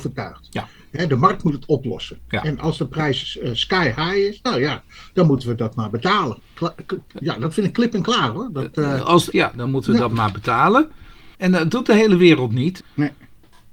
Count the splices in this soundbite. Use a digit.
3